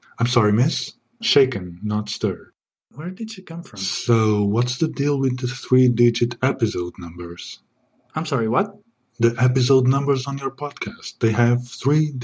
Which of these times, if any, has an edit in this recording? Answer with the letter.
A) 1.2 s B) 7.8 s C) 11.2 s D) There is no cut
A